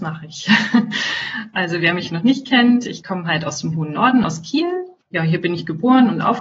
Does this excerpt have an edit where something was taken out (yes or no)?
no